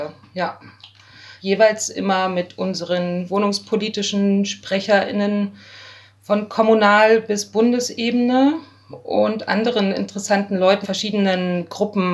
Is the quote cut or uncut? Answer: cut